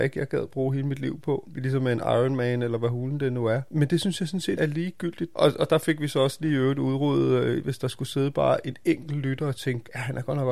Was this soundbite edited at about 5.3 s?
yes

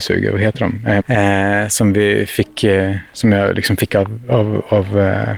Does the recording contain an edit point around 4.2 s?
no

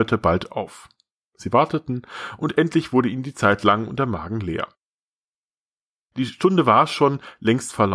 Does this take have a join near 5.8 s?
no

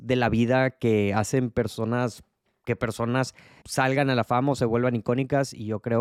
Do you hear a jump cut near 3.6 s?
yes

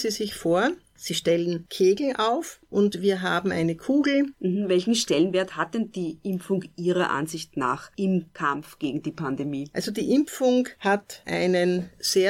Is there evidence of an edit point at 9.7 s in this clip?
no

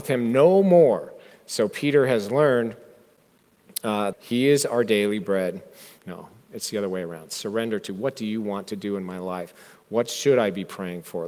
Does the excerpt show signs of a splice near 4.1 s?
yes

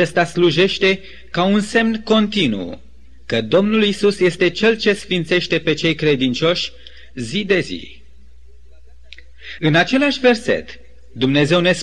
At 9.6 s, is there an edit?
yes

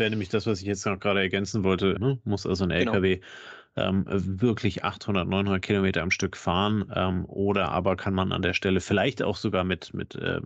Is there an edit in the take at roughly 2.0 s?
yes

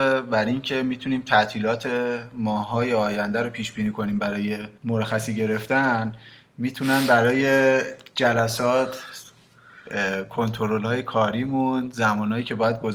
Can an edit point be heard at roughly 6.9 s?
no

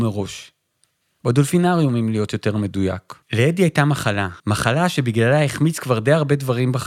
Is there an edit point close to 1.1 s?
no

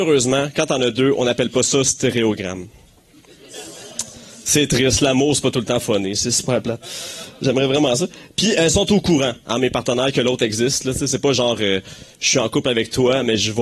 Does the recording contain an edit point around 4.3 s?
no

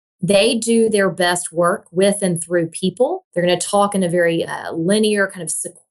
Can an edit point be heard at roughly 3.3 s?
yes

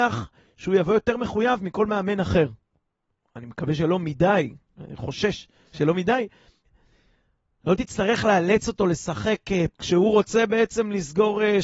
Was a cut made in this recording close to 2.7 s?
no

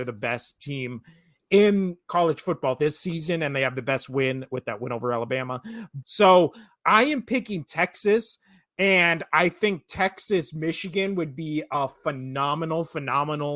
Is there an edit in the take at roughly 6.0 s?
yes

